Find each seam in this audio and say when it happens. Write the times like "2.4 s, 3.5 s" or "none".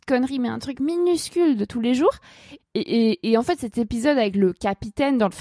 2.6 s